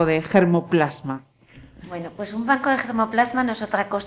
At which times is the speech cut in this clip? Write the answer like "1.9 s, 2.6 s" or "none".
none